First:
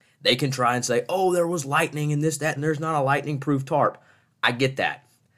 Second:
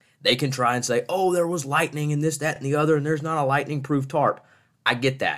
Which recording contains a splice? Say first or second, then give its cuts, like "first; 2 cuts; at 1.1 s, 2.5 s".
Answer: first; 1 cut; at 2.6 s